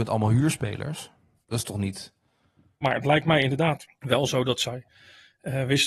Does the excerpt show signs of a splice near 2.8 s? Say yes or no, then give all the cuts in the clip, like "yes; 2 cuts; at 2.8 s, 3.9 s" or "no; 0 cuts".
yes; 2 cuts; at 2.8 s, 4.0 s